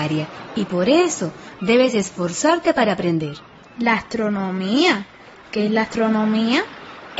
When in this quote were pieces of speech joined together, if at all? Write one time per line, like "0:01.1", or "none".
0:03.6